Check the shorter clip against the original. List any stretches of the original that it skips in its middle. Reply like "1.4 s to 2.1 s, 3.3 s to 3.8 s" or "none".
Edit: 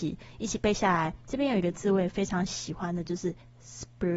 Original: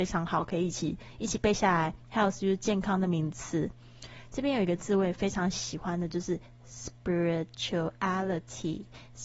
2.0 s to 4.3 s